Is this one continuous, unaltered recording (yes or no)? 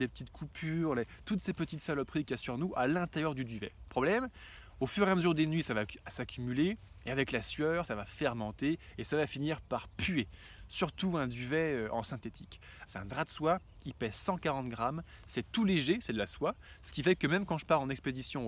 no